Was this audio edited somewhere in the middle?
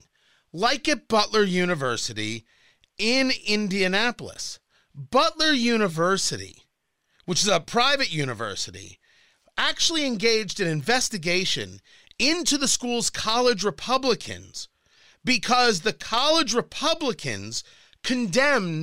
no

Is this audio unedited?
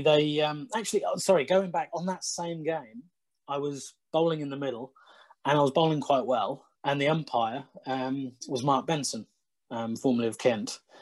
no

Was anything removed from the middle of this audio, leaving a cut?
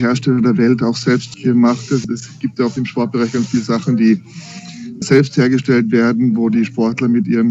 yes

